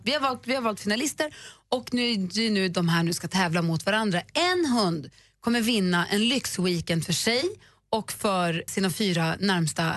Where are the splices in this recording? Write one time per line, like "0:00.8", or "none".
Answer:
0:08.7